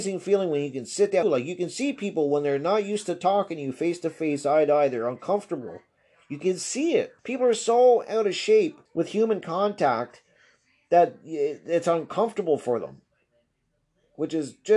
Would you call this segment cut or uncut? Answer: cut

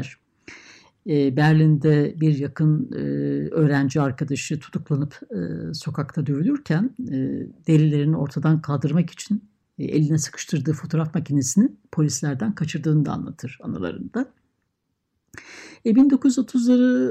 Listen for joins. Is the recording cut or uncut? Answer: uncut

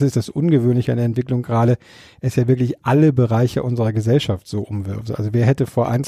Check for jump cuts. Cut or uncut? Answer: uncut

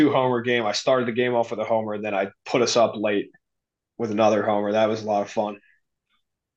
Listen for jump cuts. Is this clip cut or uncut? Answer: uncut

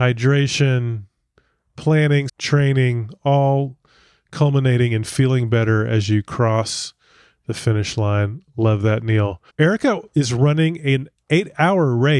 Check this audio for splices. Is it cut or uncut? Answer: cut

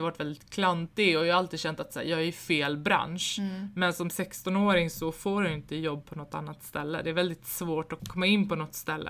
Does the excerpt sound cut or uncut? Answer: cut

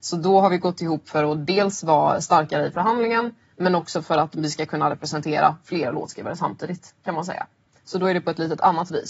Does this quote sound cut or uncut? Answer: uncut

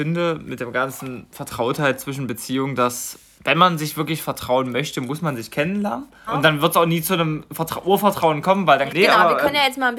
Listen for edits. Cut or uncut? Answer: cut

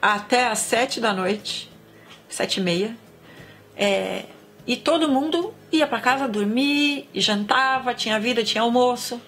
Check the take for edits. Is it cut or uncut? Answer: uncut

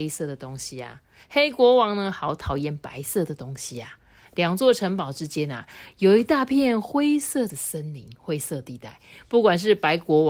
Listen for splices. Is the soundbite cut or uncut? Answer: uncut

